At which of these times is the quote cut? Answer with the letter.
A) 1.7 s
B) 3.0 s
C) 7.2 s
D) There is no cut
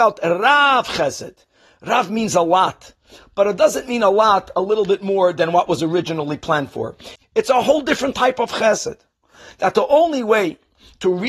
C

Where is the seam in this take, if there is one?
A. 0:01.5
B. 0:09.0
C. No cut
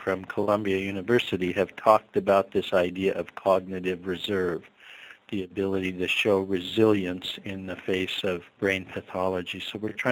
C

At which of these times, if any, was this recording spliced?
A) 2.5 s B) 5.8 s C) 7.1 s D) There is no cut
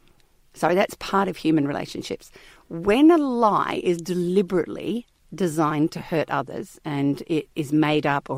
D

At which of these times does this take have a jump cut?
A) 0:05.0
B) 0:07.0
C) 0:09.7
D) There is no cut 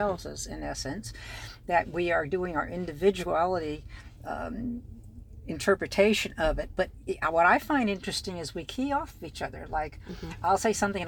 B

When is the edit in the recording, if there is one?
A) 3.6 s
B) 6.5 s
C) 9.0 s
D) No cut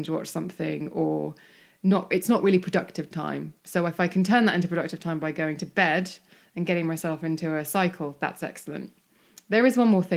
A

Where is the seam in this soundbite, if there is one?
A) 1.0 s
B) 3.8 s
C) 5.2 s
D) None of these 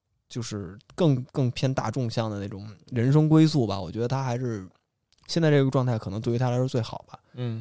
D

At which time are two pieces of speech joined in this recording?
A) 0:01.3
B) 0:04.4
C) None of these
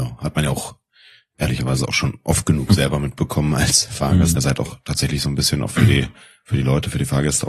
B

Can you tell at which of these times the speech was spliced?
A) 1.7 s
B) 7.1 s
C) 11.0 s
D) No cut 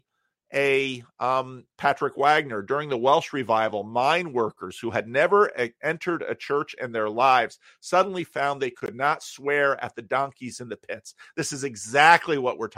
A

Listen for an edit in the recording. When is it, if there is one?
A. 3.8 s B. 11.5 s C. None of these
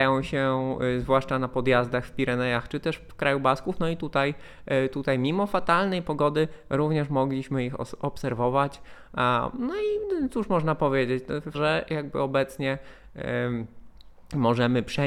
B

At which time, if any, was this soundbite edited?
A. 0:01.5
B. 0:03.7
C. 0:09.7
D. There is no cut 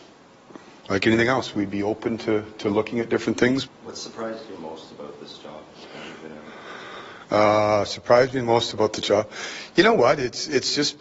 B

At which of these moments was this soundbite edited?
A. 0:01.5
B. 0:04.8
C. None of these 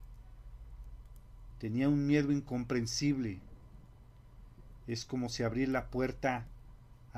A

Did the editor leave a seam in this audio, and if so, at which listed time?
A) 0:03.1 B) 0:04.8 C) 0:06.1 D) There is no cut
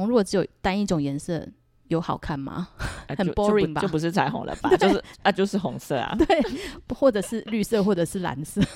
D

